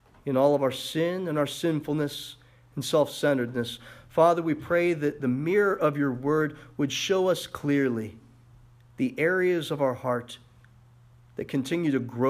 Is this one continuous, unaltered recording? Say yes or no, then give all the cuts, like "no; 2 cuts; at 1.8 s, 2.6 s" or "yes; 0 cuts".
yes; 0 cuts